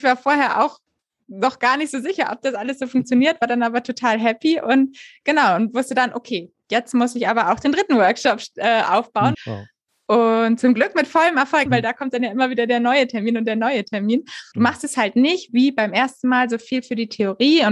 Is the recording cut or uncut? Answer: cut